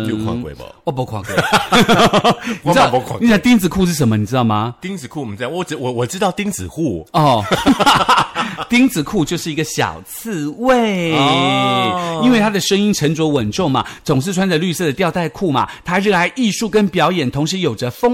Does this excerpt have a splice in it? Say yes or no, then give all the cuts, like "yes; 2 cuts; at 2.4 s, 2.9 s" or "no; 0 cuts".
no; 0 cuts